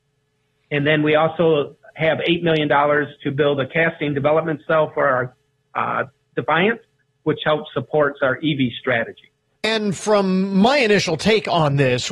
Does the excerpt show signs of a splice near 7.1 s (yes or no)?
no